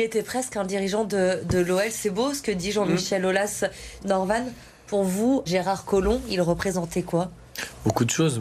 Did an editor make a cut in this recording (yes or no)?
yes